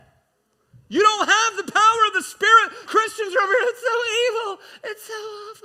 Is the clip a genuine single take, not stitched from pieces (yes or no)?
no